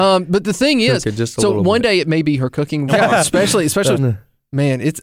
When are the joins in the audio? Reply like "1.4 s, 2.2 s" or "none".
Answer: 2.9 s, 3.9 s